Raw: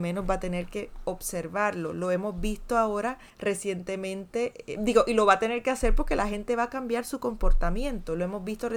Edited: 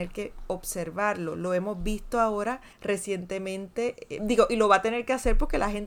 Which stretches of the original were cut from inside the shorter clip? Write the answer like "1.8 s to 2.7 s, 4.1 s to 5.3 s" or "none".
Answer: none